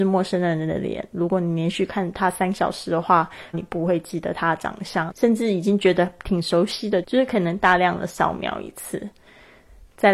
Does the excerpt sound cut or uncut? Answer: cut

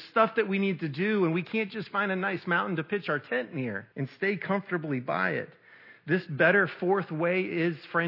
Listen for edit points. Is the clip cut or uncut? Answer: cut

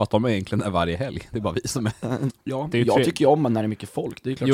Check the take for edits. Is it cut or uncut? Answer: cut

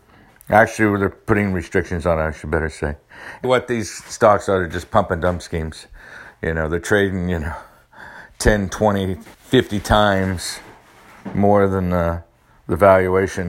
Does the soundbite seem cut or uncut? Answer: cut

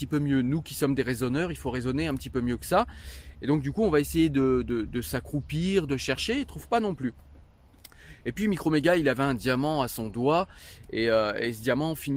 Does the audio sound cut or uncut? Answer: cut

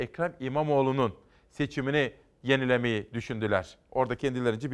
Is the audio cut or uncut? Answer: uncut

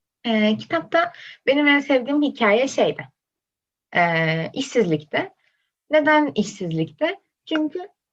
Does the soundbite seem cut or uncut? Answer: uncut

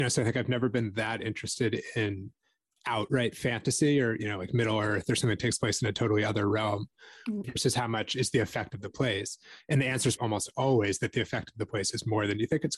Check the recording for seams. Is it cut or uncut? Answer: cut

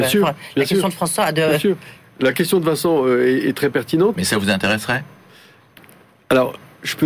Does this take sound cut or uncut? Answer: cut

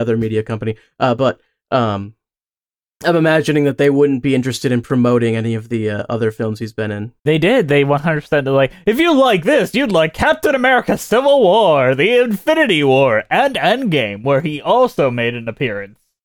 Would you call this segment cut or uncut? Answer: uncut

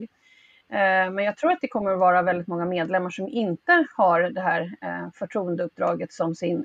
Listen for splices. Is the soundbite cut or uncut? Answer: uncut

